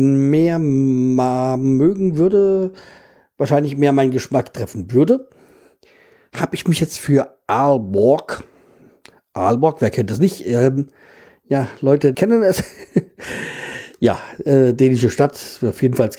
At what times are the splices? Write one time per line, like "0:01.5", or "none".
0:12.1